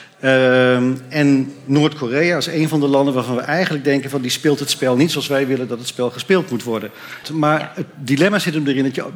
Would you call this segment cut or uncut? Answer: cut